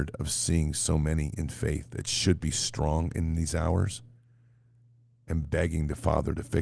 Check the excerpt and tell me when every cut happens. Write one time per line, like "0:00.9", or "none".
0:05.3